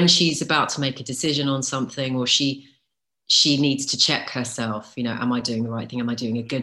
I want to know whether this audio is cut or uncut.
uncut